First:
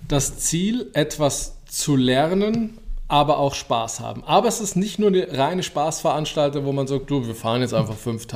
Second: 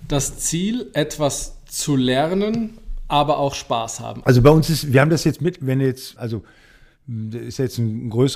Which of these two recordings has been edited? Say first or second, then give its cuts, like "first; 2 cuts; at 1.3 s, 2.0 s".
second; 2 cuts; at 4.2 s, 6.2 s